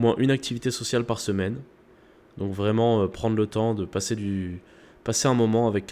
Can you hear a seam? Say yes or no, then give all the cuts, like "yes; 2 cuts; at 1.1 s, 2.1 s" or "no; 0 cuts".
no; 0 cuts